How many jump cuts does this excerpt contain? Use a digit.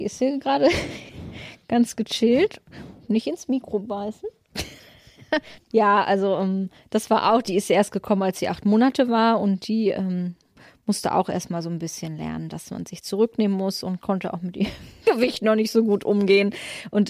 0